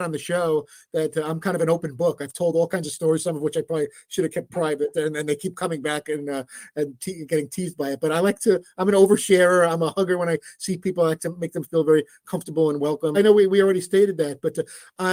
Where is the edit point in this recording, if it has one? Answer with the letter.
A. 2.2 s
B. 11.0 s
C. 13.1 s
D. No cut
C